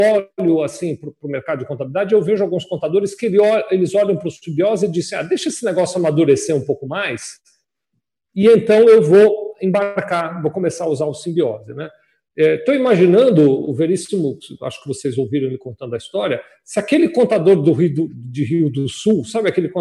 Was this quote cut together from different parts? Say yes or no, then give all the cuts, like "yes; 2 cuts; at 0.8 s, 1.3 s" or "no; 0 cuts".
no; 0 cuts